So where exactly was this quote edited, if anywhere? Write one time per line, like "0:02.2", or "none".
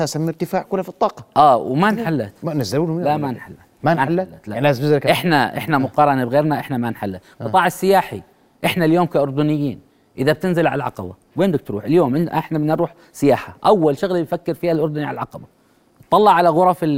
none